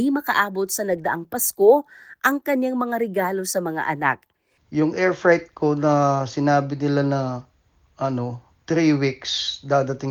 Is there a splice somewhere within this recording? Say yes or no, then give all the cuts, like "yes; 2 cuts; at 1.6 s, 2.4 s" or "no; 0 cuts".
yes; 2 cuts; at 4.6 s, 8.6 s